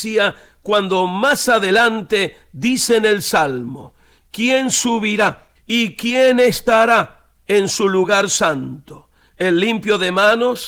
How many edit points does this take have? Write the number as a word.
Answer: one